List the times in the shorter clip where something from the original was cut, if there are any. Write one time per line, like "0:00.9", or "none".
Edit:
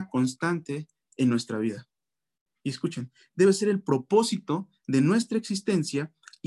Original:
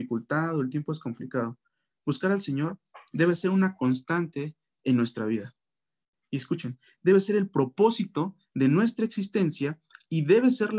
none